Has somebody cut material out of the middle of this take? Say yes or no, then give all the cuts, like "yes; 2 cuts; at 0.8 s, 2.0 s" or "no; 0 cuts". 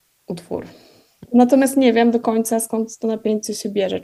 yes; 1 cut; at 1.3 s